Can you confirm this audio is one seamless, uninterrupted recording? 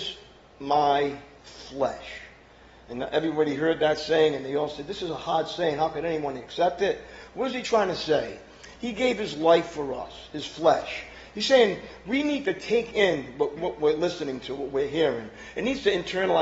no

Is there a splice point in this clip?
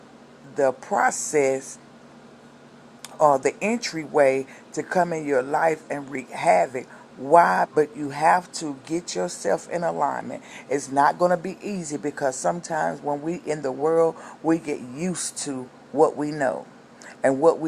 yes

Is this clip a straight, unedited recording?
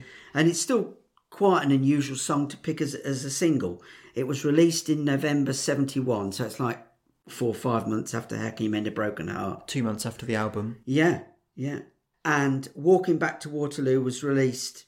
yes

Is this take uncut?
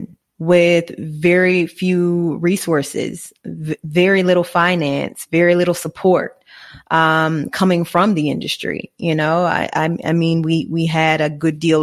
yes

